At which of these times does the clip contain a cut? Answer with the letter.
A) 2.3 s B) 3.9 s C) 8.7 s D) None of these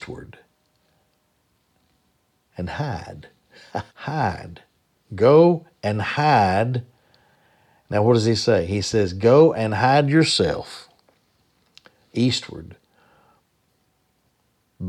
B